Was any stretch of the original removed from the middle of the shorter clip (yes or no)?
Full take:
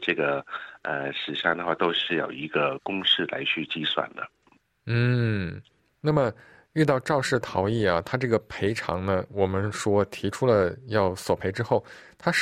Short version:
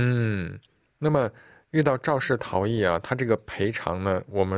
no